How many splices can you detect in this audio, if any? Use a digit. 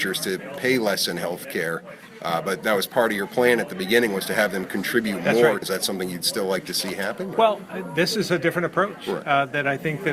1